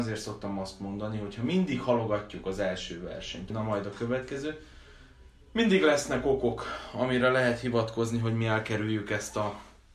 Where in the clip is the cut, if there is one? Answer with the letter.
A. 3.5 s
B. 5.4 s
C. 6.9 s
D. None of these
A